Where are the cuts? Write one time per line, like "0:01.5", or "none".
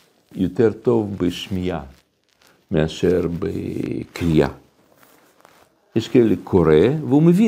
none